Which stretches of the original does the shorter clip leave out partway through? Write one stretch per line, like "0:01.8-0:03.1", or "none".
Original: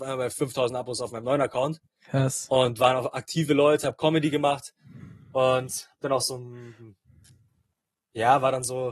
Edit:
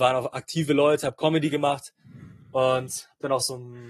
none